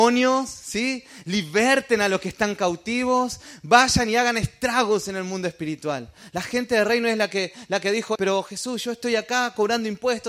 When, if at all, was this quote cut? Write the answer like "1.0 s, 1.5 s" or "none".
8.2 s